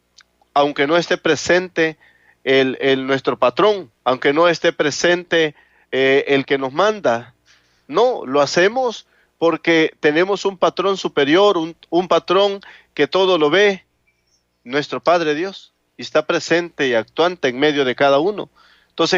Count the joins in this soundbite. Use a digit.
1